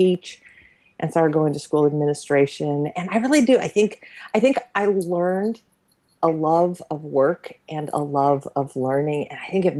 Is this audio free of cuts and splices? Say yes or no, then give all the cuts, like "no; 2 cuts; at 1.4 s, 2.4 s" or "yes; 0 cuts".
yes; 0 cuts